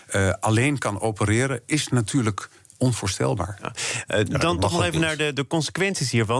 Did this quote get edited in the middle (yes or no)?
no